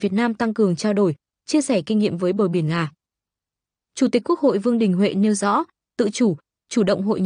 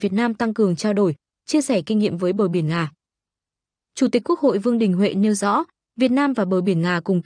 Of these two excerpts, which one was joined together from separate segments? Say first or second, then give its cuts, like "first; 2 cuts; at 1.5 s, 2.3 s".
first; 1 cut; at 5.9 s